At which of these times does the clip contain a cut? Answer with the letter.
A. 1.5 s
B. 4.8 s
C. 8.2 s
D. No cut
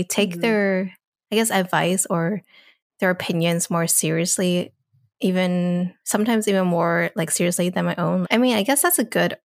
C